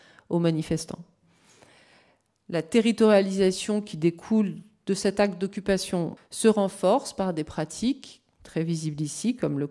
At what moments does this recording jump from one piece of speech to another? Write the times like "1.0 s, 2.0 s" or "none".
6.2 s

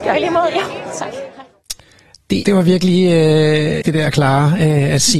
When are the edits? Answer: 2.4 s, 3.8 s

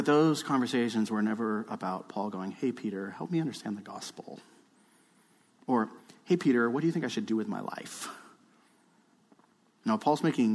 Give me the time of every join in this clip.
none

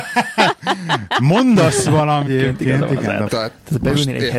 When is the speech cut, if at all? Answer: 2.3 s, 3.3 s

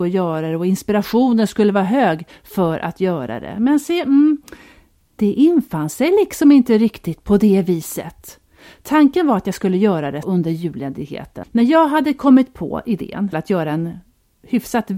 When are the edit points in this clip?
10.2 s, 11.4 s, 13.3 s

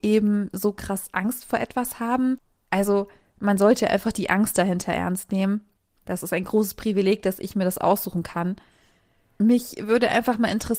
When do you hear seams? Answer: 5.9 s

